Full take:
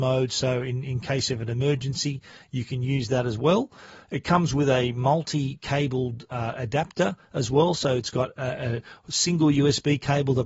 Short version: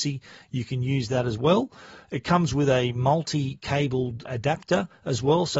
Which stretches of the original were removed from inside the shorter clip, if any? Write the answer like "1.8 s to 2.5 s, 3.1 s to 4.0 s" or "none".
6.3 s to 6.5 s